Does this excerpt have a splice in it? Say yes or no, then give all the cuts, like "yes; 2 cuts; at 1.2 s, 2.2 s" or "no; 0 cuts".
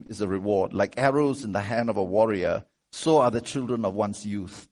no; 0 cuts